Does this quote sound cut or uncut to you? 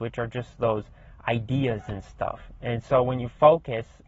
uncut